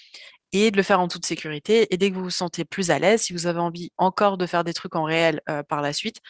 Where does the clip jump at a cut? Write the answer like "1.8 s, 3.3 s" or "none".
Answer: none

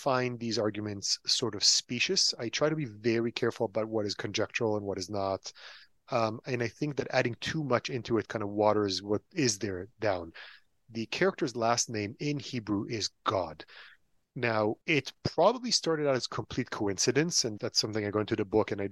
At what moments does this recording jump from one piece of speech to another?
14.8 s, 17.6 s

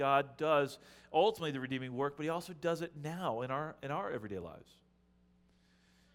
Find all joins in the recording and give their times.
none

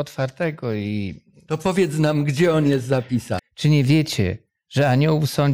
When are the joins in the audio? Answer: 3.4 s

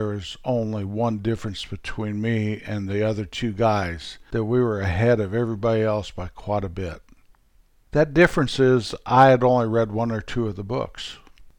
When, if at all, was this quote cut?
none

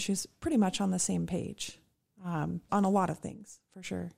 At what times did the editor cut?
2.7 s

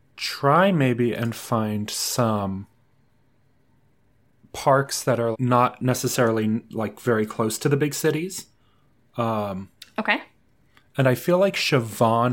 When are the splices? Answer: 5.3 s

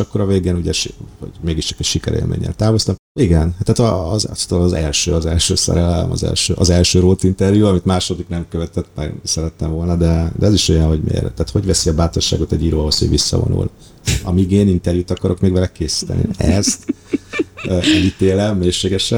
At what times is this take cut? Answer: none

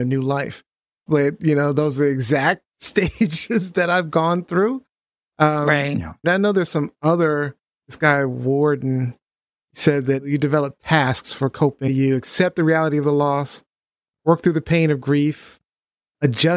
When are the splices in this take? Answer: 1.1 s, 6.2 s

